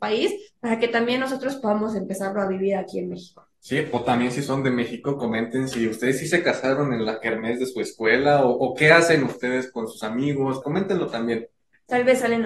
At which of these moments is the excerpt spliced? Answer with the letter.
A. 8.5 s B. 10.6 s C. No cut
B